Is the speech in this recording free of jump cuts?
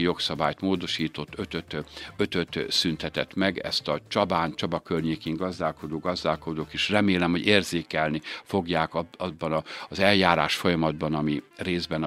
yes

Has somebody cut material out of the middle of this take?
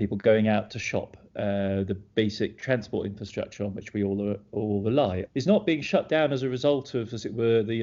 yes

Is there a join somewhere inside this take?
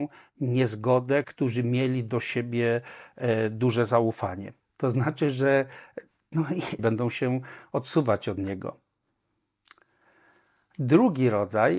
yes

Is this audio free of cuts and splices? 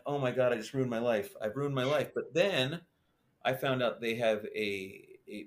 yes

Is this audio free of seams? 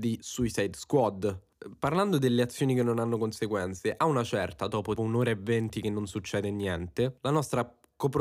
no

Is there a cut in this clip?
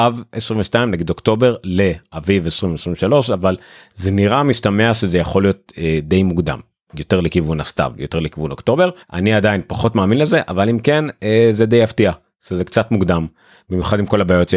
yes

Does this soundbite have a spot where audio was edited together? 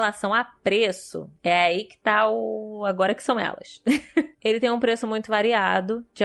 no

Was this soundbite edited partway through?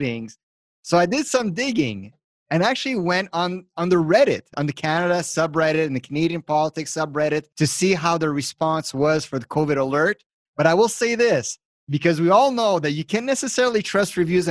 yes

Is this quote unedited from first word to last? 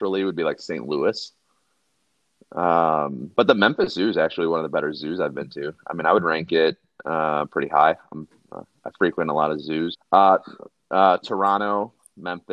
no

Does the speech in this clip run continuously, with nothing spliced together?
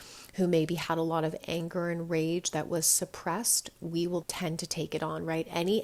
no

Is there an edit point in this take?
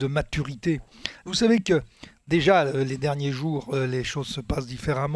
yes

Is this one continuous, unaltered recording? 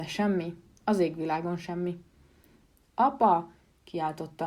no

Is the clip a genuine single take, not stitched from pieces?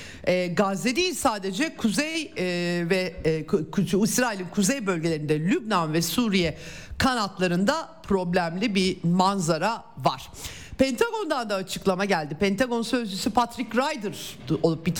yes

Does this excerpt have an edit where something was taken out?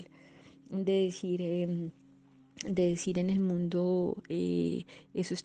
no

